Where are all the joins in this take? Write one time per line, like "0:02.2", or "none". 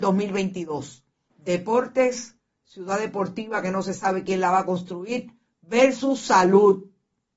0:01.3